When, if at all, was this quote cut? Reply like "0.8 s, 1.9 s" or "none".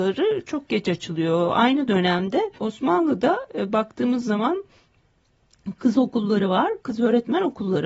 2.6 s